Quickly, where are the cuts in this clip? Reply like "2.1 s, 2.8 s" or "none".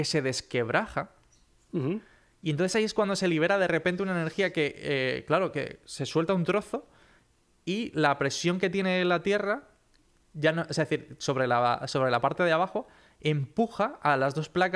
none